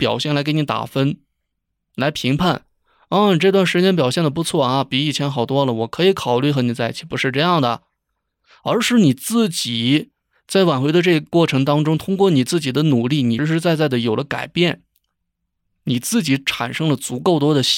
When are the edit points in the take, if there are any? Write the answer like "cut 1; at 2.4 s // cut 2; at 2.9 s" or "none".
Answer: cut 1; at 13.4 s

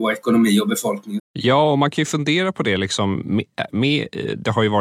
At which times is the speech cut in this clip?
cut 1; at 1.2 s

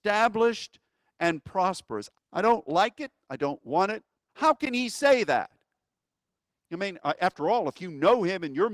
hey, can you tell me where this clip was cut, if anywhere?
cut 1; at 2.1 s // cut 2; at 4.3 s

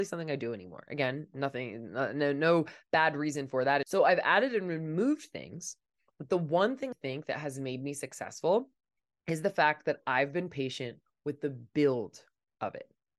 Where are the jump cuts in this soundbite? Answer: cut 1; at 3.8 s // cut 2; at 6.9 s

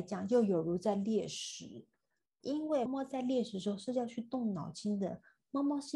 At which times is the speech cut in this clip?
cut 1; at 2.9 s

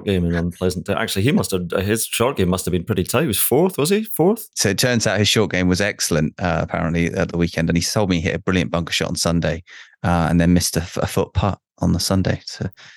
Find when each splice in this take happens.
none

